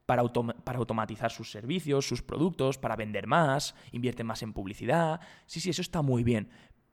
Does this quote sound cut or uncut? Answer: uncut